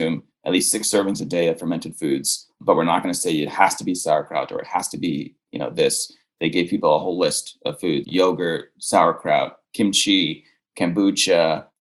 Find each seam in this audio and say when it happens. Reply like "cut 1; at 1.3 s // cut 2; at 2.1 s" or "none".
cut 1; at 8.0 s